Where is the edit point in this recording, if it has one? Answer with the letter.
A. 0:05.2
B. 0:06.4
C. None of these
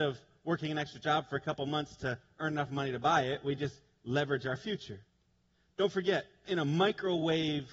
B